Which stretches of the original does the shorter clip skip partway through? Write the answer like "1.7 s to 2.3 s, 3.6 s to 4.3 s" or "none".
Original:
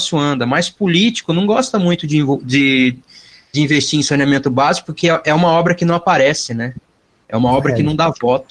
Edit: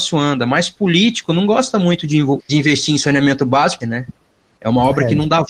2.4 s to 3.4 s, 4.9 s to 6.5 s

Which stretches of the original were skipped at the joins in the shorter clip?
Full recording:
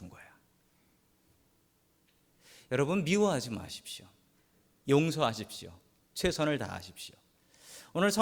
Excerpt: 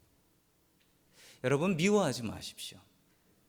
none

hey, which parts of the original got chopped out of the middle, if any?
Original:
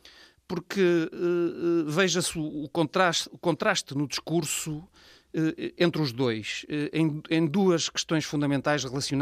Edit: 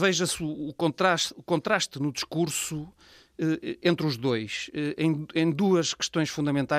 none

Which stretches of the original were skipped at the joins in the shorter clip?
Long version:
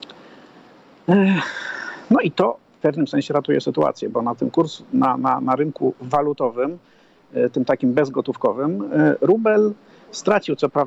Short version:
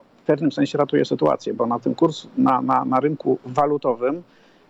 none

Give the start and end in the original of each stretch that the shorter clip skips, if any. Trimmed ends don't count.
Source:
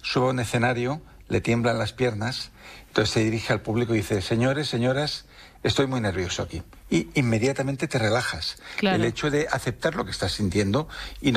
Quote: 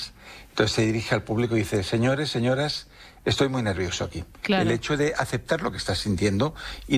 6.8 s to 8.8 s

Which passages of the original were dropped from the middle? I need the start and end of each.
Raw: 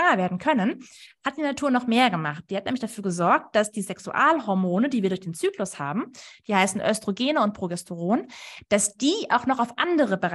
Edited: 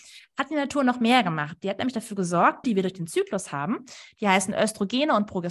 3.5 s to 4.9 s

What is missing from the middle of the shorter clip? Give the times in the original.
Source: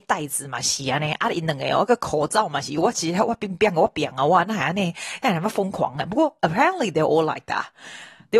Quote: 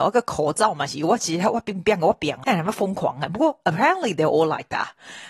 4.2 s to 5.2 s

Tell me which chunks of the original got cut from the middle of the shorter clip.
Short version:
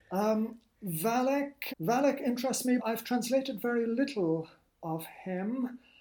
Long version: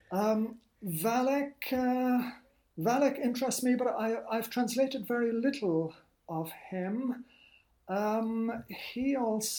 1.7 s to 2.7 s, 3.8 s to 4.2 s

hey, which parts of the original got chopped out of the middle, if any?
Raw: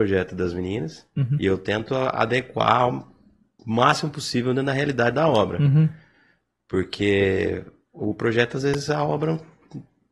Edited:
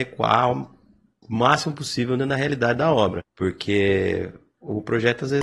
5.6 s to 6.5 s

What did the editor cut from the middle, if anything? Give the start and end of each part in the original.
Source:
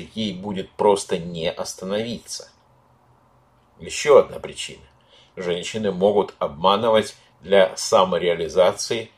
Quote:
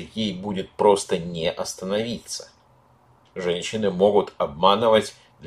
3.3 s to 5.3 s

